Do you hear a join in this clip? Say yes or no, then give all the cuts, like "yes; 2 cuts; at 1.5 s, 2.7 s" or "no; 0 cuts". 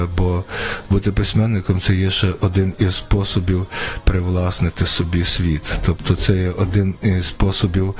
no; 0 cuts